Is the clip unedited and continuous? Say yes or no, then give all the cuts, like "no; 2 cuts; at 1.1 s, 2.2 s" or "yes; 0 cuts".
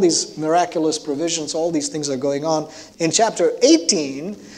no; 1 cut; at 2.9 s